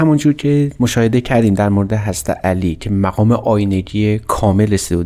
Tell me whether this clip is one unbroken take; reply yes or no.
yes